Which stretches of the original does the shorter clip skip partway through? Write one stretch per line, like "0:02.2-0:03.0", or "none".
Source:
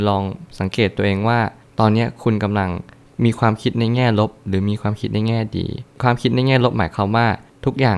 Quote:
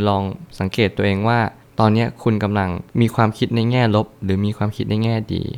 0:02.9-0:03.1